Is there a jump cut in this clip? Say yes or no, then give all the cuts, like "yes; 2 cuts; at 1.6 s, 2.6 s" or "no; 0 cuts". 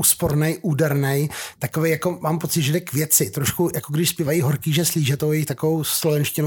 no; 0 cuts